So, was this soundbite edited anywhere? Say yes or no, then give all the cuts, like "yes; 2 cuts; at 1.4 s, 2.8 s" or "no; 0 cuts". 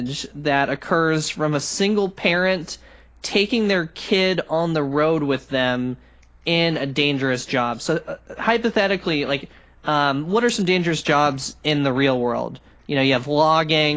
no; 0 cuts